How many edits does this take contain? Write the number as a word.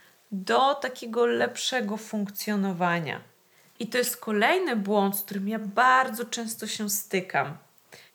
one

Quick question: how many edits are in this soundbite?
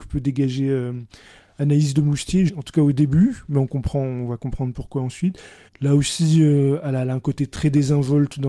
two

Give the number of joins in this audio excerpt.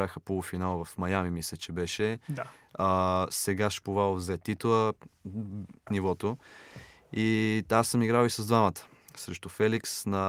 one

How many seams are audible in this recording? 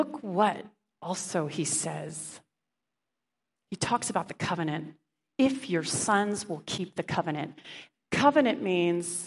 one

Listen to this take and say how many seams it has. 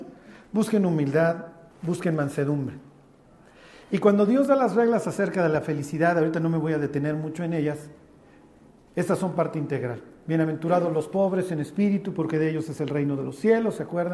one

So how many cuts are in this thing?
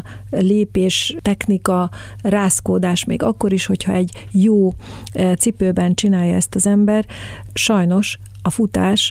zero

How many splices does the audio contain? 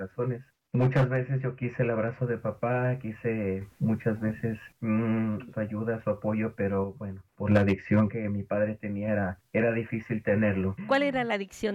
one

